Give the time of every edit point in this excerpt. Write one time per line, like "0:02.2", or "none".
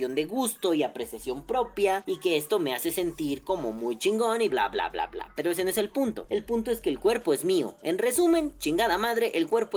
0:04.5